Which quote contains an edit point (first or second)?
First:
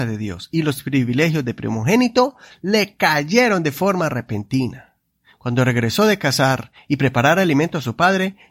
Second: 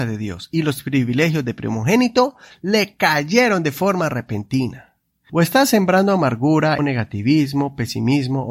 second